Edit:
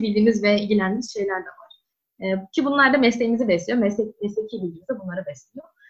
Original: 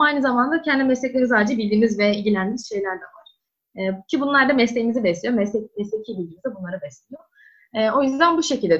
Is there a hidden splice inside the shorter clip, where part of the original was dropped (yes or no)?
no